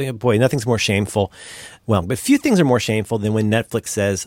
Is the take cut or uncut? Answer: cut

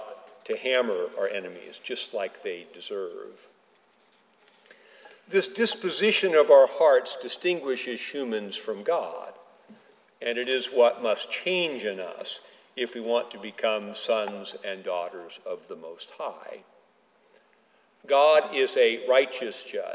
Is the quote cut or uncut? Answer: uncut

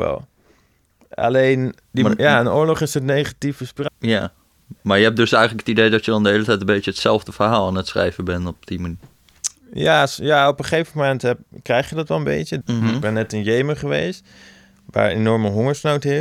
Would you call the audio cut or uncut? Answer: cut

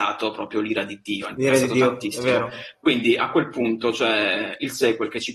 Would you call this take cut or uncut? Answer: uncut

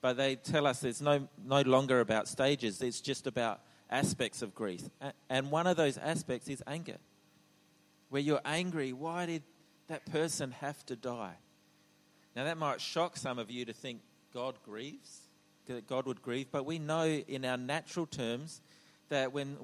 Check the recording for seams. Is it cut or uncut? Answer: cut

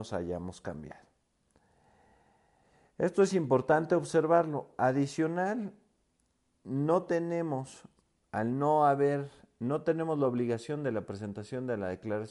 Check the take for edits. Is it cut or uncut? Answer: uncut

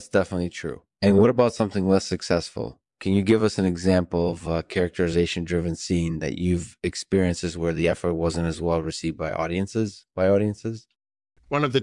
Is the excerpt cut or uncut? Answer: uncut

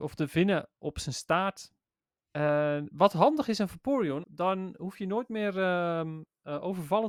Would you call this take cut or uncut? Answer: cut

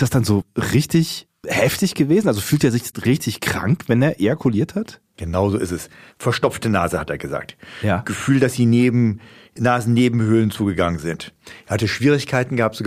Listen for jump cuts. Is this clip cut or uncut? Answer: uncut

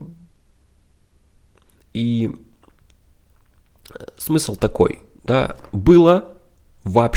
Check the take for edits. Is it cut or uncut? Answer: uncut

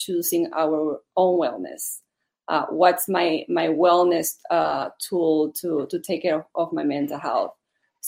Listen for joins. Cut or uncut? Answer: uncut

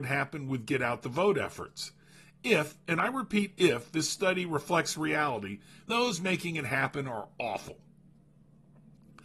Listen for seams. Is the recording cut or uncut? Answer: cut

